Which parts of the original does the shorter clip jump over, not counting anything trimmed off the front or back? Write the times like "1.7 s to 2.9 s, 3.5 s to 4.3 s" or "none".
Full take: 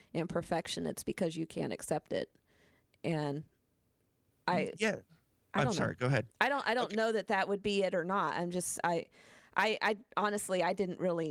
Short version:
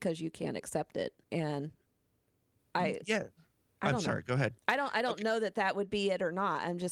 2.4 s to 3.0 s